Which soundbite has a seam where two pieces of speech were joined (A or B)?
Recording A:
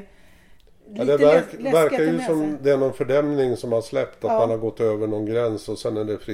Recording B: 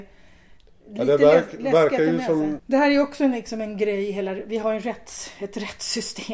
B